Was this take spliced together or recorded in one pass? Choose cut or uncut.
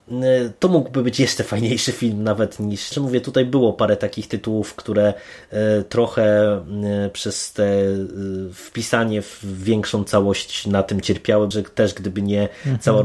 cut